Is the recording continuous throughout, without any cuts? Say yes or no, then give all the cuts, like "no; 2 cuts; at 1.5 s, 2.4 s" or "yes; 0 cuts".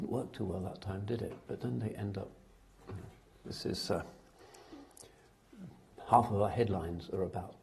yes; 0 cuts